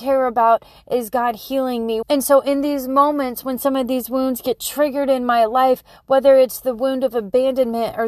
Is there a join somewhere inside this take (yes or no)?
yes